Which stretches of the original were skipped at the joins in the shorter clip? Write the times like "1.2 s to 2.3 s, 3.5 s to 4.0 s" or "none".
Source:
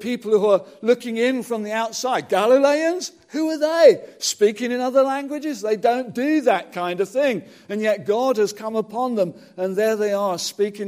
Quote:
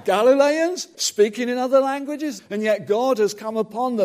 3.2 s to 4.2 s, 5.6 s to 7.6 s